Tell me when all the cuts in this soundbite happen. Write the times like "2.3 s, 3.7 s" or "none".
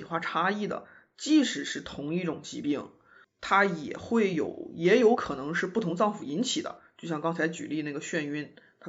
none